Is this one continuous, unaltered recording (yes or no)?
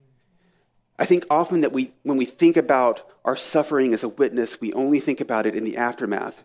yes